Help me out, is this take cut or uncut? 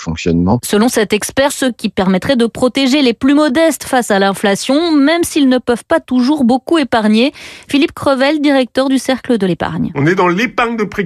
cut